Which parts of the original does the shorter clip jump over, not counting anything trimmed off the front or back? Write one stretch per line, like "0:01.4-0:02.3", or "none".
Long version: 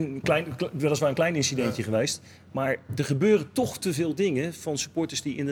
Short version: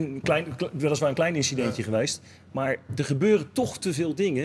none